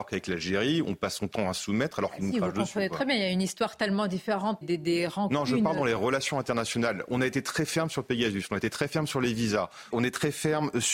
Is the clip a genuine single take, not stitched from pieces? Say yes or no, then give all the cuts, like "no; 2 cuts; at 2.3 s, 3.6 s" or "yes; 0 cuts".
no; 2 cuts; at 4.6 s, 9.9 s